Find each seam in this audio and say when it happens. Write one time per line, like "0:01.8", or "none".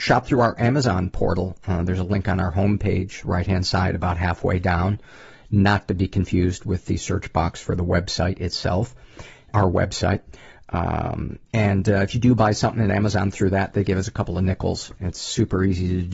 0:09.5
0:15.0